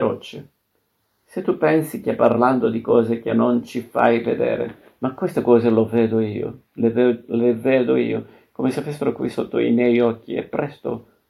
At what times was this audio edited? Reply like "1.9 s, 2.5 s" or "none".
5.0 s